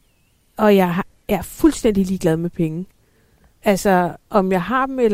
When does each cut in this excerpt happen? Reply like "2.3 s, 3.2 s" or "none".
none